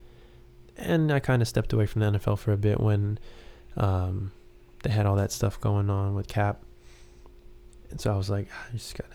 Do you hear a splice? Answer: no; 0 cuts

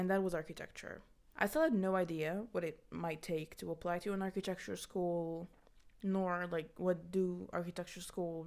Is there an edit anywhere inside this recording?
yes; 1 cut; at 1.3 s

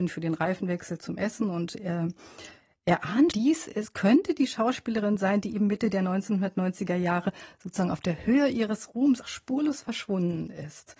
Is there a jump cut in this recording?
yes; 2 cuts; at 3.3 s, 9.2 s

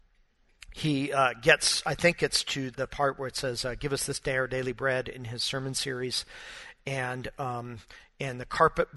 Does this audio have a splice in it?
yes; 1 cut; at 2.7 s

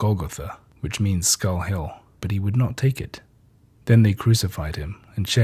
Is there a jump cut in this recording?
yes; 1 cut; at 2.2 s

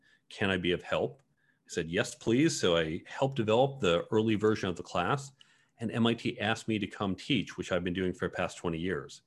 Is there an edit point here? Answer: no; 0 cuts

